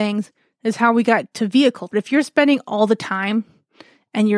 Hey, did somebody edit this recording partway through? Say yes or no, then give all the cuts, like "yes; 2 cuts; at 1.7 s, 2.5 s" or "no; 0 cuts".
yes; 1 cut; at 1.9 s